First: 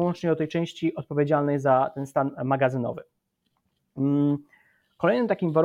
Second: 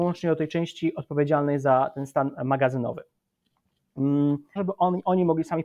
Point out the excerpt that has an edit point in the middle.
second; 1 cut; at 4.6 s

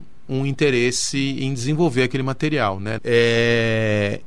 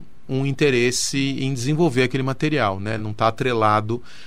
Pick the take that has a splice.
first; 1 cut; at 3.0 s

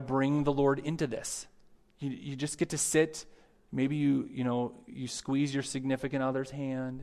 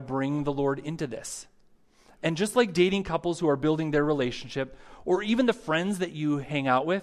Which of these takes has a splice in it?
first; 2 cuts; at 1.8 s, 4.9 s

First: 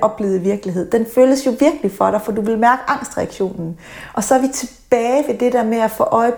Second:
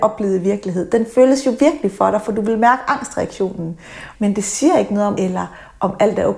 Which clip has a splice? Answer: second; 2 cuts; at 4.1 s, 5.1 s

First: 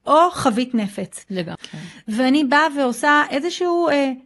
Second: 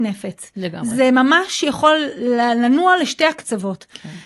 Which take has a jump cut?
first; 1 cut; at 1.6 s

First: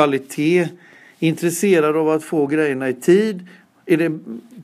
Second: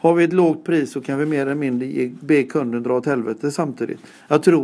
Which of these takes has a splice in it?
first; 1 cut; at 3.7 s

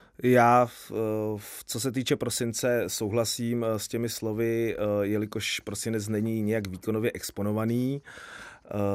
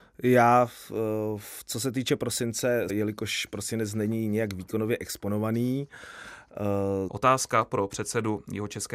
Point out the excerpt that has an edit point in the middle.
second; 2 cuts; at 2.9 s, 7.1 s

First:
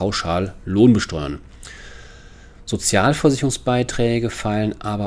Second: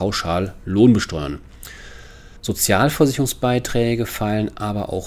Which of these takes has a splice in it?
second; 1 cut; at 2.4 s

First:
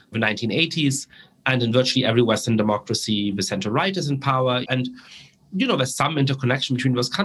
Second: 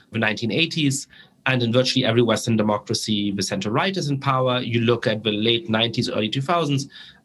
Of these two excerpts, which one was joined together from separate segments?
first; 1 cut; at 4.6 s

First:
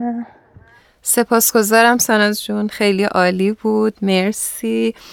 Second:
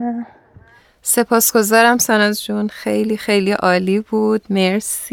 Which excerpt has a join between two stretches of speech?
first; 1 cut; at 2.7 s

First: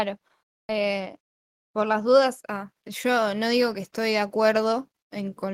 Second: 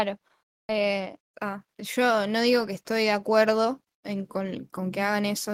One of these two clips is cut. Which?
second; 1 cut; at 1.3 s

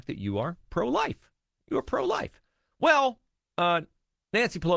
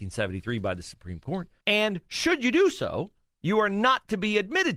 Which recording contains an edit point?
second; 1 cut; at 1.6 s

